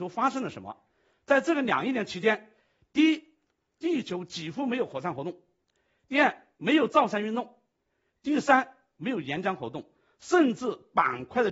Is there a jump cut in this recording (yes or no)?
no